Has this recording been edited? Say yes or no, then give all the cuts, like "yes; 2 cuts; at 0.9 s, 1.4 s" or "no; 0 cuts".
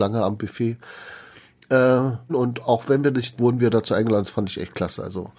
yes; 2 cuts; at 2.3 s, 3.4 s